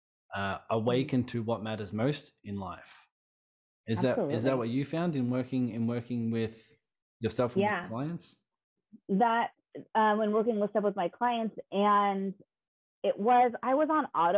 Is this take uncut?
yes; 0 cuts

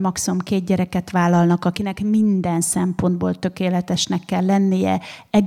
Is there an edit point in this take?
no; 0 cuts

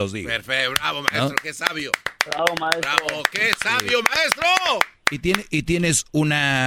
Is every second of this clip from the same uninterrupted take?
yes; 0 cuts

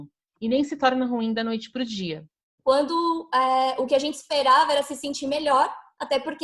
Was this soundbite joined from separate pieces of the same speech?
yes; 1 cut; at 2.6 s

